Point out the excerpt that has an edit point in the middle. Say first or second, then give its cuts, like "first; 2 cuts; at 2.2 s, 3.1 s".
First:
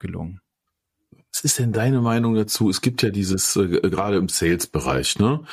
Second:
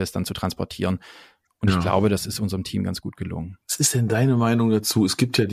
second; 1 cut; at 3.6 s